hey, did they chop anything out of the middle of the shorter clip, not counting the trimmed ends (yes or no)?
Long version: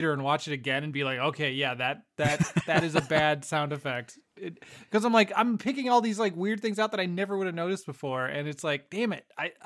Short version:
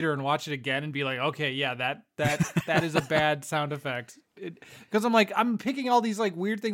no